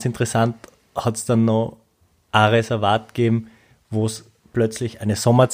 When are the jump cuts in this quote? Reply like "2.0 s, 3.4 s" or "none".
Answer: none